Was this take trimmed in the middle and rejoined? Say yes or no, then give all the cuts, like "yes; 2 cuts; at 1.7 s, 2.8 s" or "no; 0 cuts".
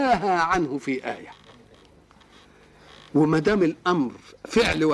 no; 0 cuts